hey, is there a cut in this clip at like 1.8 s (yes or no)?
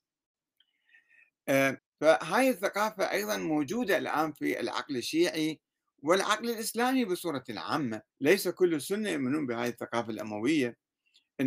yes